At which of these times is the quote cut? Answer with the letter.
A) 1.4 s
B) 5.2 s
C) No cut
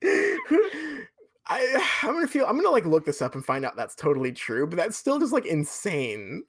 C